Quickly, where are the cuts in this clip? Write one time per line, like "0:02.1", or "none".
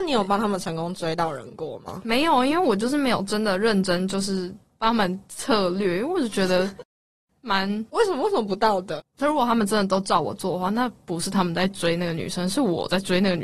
0:07.9